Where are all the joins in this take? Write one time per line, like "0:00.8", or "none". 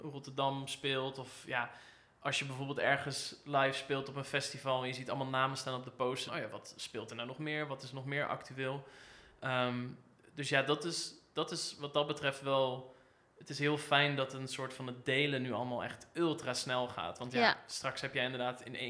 0:06.3